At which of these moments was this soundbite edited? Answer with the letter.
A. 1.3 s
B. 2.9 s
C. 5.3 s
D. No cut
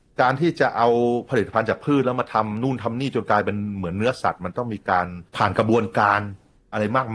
C